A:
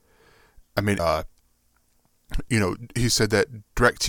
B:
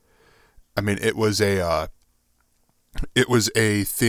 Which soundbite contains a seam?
A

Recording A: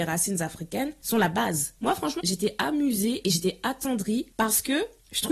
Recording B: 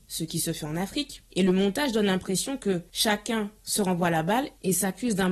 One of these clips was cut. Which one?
A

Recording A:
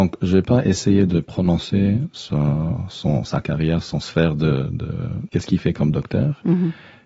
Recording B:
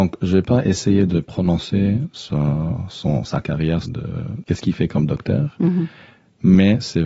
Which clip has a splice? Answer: B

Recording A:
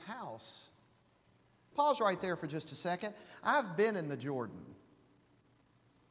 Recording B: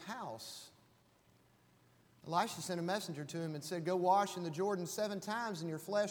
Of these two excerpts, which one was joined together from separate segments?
A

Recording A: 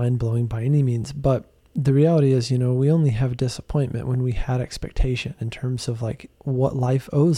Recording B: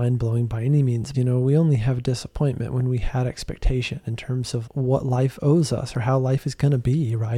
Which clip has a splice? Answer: B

